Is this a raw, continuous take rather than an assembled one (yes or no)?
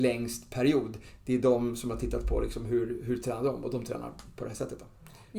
yes